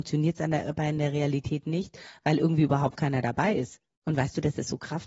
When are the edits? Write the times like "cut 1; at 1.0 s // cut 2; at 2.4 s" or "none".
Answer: cut 1; at 4.0 s